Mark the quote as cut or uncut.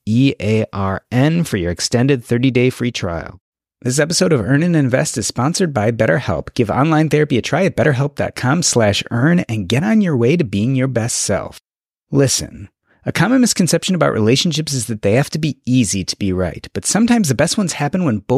uncut